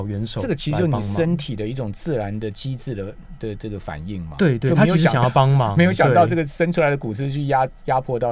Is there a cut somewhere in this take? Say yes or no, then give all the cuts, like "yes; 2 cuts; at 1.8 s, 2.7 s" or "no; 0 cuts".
no; 0 cuts